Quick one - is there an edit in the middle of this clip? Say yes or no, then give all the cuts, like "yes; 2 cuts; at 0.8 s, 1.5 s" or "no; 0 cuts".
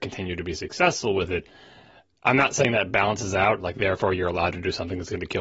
no; 0 cuts